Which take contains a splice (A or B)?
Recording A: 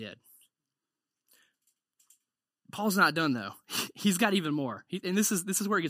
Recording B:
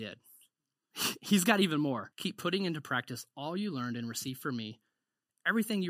B